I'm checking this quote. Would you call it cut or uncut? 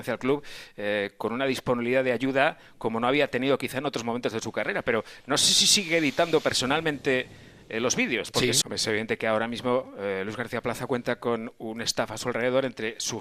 cut